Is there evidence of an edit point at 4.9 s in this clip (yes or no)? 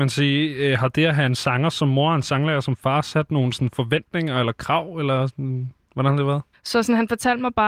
no